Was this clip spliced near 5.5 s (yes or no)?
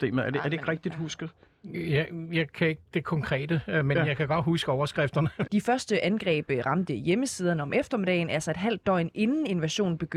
yes